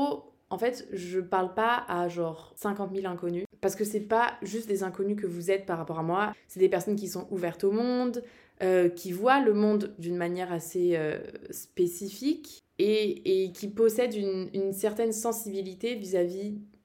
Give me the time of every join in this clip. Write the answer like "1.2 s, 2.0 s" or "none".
6.3 s